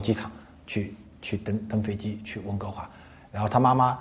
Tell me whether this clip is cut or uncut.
uncut